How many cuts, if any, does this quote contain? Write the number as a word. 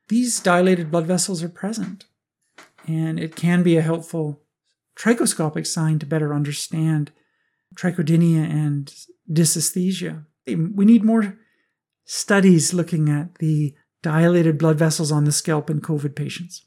one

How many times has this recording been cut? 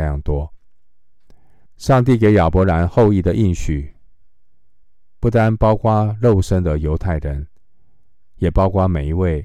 one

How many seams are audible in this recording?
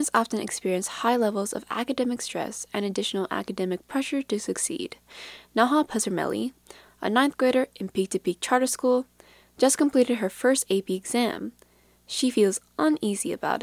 zero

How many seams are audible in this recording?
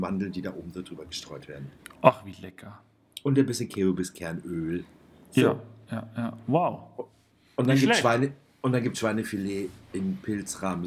one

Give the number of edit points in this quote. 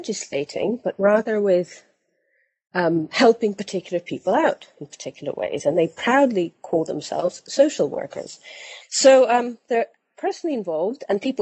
one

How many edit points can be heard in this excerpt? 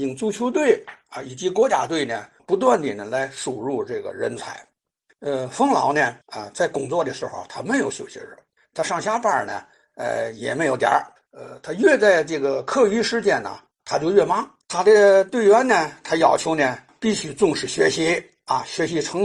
one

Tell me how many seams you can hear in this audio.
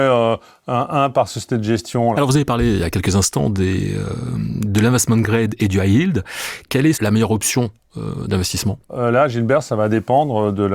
three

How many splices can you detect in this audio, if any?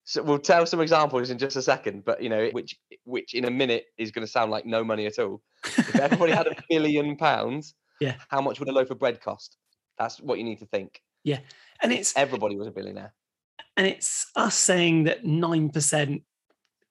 one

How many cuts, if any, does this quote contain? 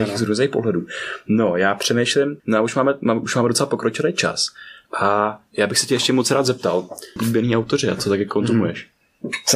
two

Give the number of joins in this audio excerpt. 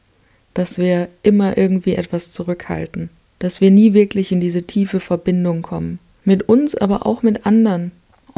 zero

